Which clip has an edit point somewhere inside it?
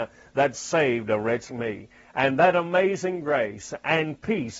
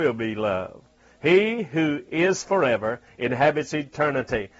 first; 1 cut; at 1.5 s

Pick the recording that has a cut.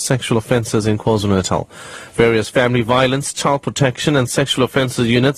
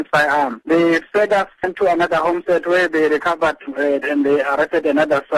second; 1 cut; at 4.0 s

